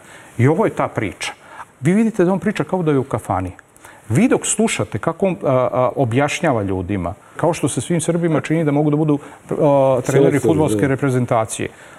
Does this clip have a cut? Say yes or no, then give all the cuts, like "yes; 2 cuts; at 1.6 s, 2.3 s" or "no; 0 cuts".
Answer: yes; 2 cuts; at 1.7 s, 7.4 s